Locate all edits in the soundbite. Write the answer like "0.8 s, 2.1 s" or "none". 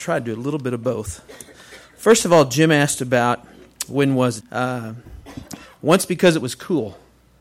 4.4 s